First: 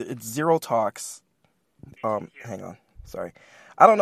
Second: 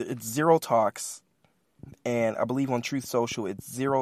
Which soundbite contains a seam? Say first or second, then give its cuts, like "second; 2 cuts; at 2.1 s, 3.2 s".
first; 1 cut; at 2.0 s